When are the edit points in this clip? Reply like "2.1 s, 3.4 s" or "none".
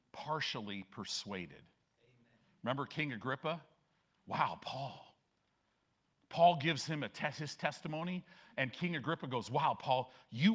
none